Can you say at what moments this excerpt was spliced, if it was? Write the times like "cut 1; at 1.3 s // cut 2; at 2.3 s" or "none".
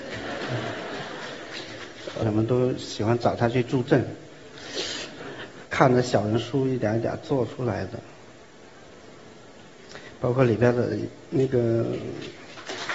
cut 1; at 2.2 s // cut 2; at 5.7 s